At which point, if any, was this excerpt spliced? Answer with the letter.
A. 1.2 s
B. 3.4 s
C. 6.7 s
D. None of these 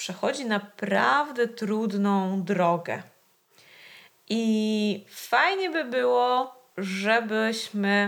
D